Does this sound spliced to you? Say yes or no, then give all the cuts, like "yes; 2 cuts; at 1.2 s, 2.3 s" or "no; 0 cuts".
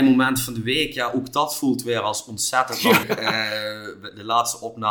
yes; 1 cut; at 3.0 s